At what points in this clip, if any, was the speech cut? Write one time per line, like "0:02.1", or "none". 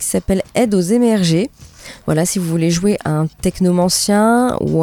none